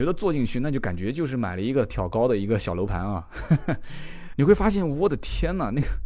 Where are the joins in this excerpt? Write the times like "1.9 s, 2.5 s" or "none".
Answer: 4.3 s